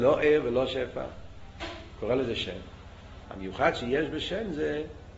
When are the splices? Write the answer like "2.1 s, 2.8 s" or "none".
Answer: 3.3 s